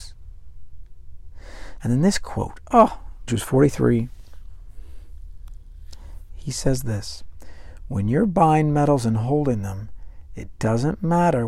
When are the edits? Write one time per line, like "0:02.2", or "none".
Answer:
0:01.8
0:03.3

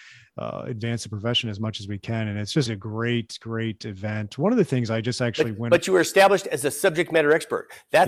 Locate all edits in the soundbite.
0:02.7

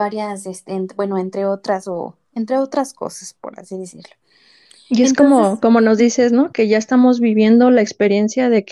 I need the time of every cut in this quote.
0:06.5

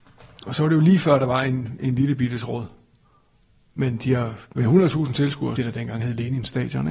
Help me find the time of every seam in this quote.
0:05.6

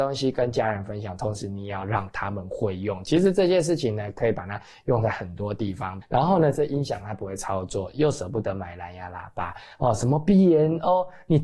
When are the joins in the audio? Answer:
0:06.0

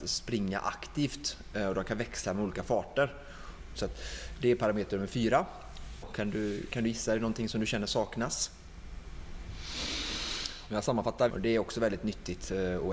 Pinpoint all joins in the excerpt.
0:03.7
0:06.0
0:11.3

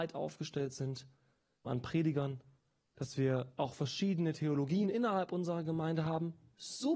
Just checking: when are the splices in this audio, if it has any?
0:01.7

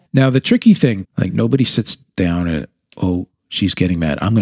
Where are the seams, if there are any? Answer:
0:01.0

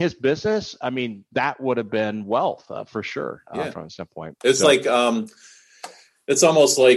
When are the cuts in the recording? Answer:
none

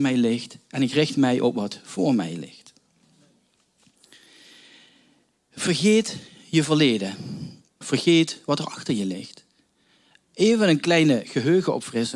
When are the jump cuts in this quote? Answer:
0:07.8

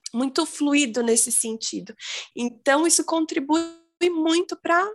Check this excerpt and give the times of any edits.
0:02.3

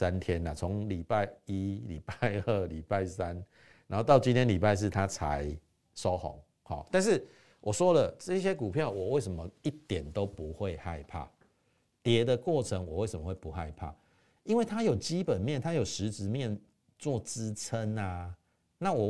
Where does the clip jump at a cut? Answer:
none

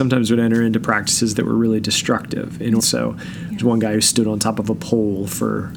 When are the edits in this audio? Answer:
0:02.8

